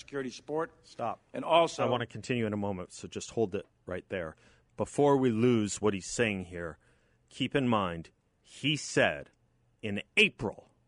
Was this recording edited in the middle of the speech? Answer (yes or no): no